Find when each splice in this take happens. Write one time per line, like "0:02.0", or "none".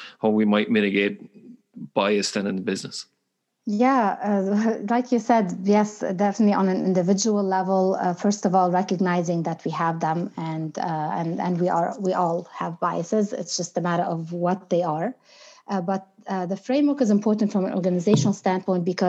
none